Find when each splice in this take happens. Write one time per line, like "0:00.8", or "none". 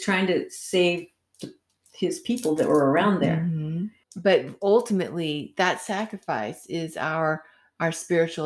0:04.0